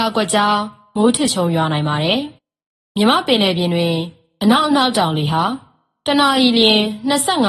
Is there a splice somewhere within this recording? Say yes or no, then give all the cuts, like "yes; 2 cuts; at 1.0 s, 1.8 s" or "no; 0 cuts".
yes; 1 cut; at 2.4 s